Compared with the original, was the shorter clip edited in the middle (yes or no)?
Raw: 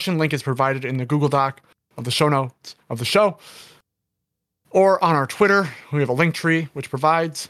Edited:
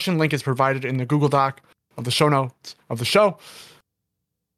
no